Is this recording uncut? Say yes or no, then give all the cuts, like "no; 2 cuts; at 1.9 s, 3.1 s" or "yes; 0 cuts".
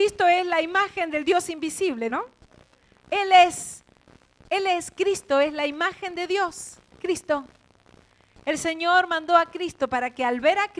no; 2 cuts; at 2.1 s, 6.9 s